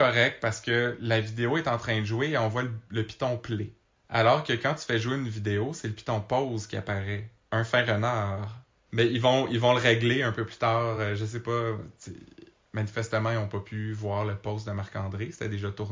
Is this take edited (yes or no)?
no